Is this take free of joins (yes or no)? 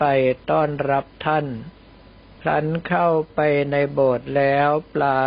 yes